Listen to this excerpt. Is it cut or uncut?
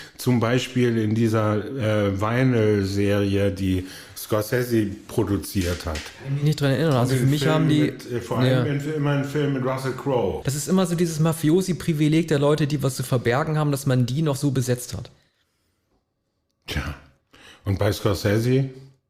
cut